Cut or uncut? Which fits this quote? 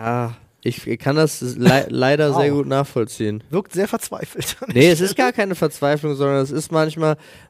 uncut